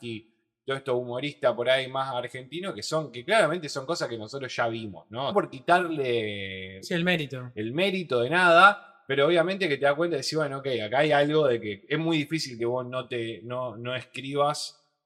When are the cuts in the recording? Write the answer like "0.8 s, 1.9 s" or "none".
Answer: 5.3 s